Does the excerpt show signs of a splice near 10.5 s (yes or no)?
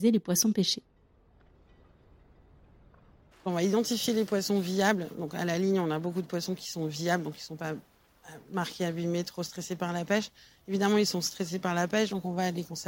no